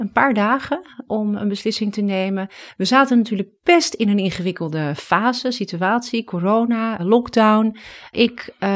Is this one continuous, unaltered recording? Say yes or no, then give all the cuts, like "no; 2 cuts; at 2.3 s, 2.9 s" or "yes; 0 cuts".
no; 1 cut; at 7.0 s